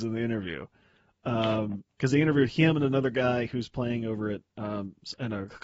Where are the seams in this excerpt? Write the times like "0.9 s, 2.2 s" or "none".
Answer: none